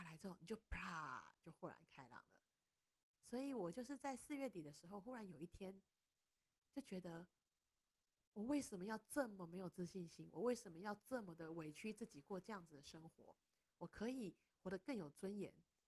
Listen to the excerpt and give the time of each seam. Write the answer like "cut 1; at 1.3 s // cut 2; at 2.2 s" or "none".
none